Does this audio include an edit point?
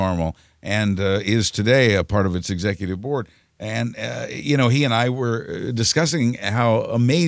no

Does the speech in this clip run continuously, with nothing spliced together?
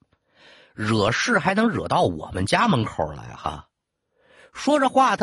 yes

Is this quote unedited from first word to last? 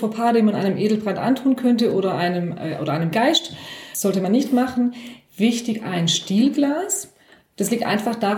yes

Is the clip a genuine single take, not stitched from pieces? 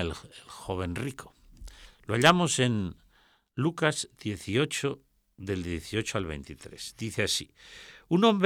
yes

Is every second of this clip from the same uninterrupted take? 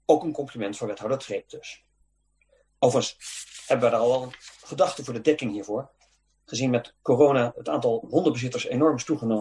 no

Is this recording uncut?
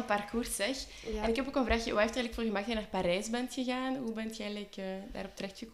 yes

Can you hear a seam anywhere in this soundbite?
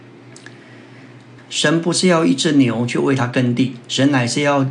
yes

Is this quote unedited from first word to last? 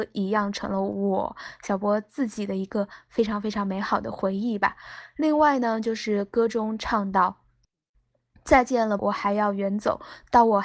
no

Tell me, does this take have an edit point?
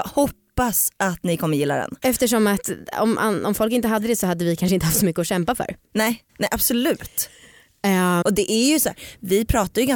yes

